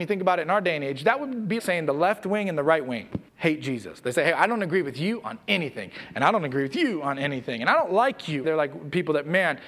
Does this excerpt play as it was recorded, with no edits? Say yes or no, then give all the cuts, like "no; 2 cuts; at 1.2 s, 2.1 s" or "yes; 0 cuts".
no; 3 cuts; at 1.6 s, 3.3 s, 8.4 s